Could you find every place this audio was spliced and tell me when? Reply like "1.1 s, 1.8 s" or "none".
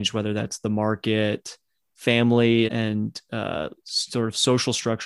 2.7 s